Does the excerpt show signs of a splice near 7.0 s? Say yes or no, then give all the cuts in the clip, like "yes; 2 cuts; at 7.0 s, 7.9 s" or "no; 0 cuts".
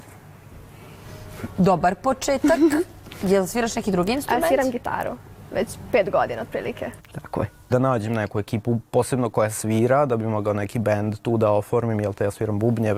yes; 1 cut; at 7.0 s